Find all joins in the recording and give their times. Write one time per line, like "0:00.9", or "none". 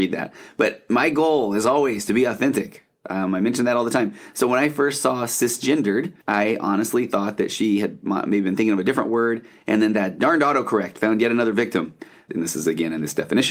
0:06.2
0:12.3